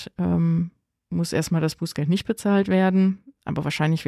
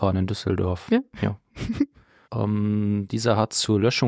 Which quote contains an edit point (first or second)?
second